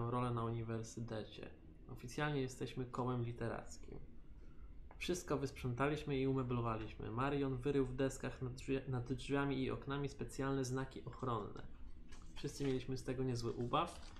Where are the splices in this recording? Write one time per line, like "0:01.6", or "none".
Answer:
none